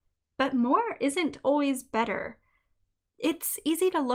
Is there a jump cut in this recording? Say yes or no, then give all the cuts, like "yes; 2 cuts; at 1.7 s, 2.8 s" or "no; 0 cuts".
no; 0 cuts